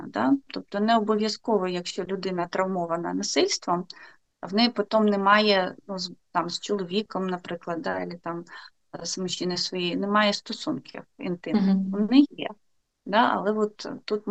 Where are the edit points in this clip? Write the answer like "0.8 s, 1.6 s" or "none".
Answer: none